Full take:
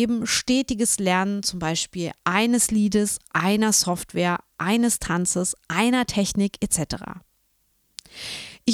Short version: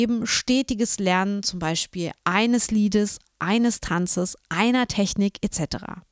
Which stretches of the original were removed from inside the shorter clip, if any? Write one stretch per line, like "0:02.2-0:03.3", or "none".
0:03.3-0:04.4

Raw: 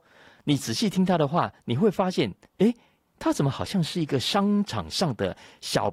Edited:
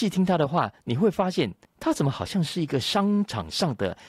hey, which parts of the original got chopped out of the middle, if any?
0:02.4-0:03.0

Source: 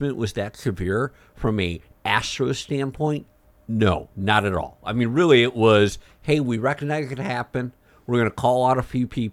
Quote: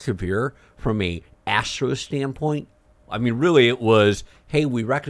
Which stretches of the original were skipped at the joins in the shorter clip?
0:03.6-0:04.8

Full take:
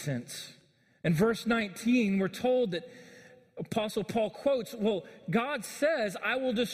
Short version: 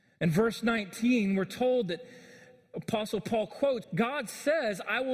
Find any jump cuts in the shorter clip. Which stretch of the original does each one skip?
0:04.7-0:05.2

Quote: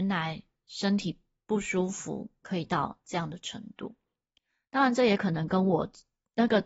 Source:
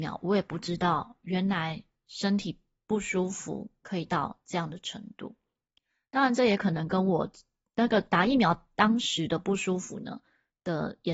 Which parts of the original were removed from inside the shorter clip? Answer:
none

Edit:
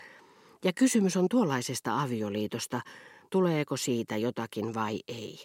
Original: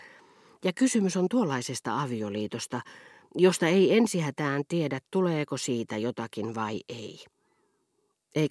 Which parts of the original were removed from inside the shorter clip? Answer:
0:03.3-0:05.1

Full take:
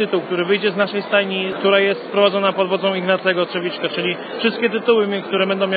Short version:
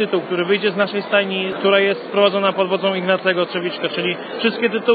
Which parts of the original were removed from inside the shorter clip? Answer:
none

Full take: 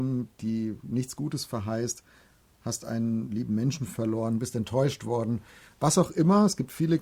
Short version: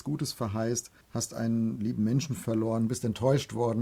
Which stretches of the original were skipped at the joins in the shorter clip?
0:02.1-0:02.5

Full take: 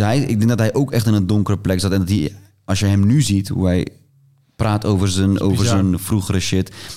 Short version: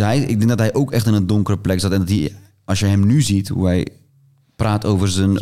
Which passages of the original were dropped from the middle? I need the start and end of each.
none

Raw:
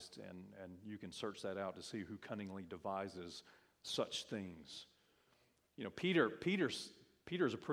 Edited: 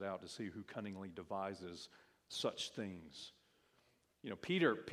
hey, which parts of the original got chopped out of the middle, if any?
none

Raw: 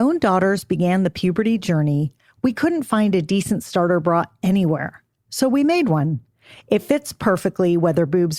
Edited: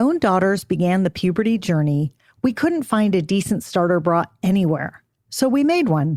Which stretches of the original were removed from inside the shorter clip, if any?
none

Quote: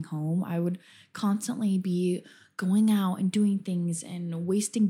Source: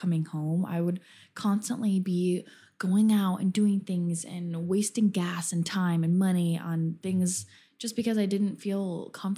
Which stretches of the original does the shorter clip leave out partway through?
none

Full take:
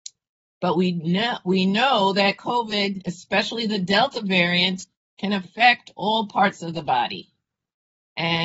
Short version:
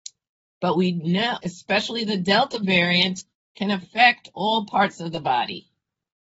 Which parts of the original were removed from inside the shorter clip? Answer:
0:01.4-0:03.0

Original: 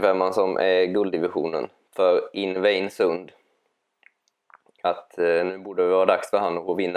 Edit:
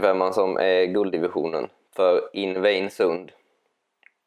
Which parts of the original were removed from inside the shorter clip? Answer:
none

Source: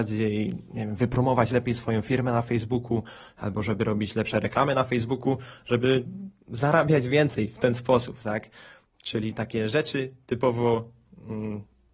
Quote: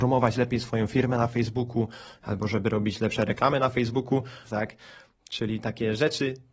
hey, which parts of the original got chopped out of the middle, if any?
0:05.6-0:08.2

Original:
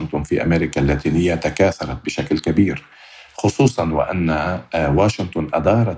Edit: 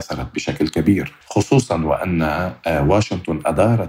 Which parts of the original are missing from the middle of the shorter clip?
0:02.9-0:03.3

